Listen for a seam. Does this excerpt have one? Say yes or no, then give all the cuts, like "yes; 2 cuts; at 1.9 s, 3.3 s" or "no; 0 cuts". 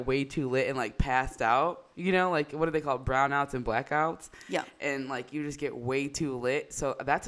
no; 0 cuts